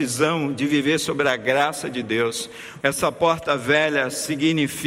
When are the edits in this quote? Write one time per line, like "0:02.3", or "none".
0:02.8